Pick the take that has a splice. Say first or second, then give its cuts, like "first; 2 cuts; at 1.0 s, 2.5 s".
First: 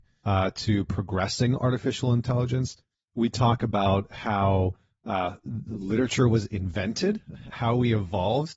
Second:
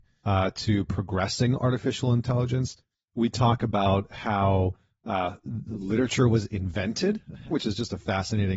second; 1 cut; at 7.5 s